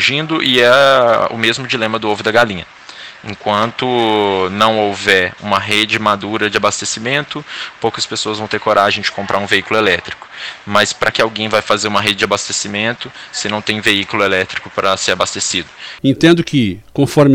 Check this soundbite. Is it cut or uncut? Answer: cut